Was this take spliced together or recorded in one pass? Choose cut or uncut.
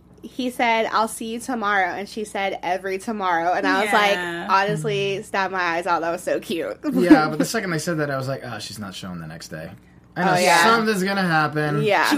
uncut